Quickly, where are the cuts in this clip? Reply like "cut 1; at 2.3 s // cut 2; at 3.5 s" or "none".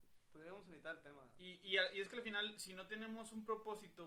cut 1; at 1.4 s